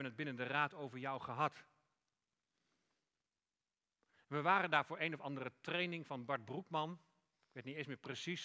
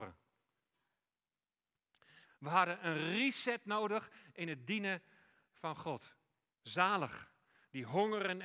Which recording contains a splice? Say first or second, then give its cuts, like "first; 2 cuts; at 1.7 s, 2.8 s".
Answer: second; 2 cuts; at 2.2 s, 6.5 s